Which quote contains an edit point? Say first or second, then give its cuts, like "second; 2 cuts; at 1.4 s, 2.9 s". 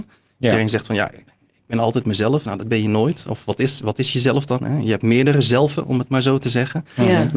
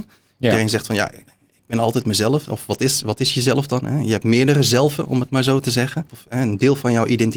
second; 2 cuts; at 2.5 s, 6.1 s